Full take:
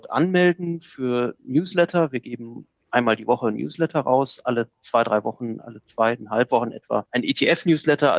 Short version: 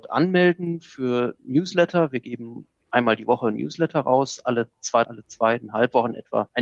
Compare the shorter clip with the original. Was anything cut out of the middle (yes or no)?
yes